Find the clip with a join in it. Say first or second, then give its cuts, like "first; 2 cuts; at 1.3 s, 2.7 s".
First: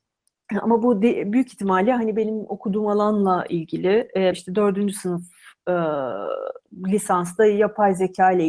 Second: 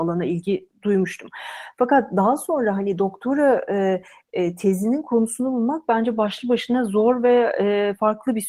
first; 1 cut; at 4.3 s